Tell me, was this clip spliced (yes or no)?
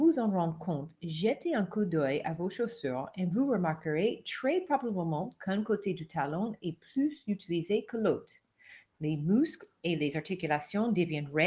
yes